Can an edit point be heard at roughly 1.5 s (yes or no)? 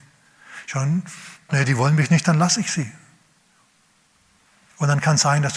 yes